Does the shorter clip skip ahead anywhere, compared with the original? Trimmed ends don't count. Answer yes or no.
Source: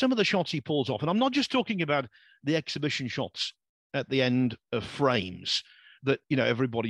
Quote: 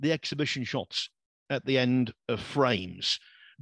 no